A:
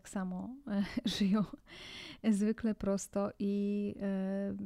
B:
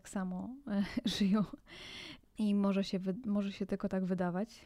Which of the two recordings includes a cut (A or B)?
B